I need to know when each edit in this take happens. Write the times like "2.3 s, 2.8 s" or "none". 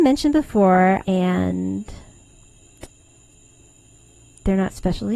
1.0 s